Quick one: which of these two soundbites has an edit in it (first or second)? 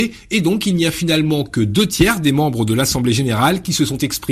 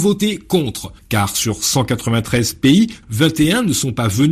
second